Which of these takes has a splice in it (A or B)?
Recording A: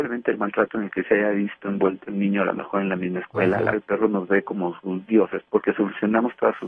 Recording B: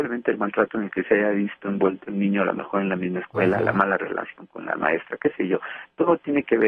A